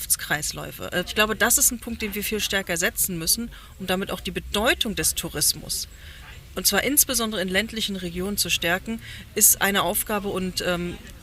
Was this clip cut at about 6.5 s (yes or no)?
no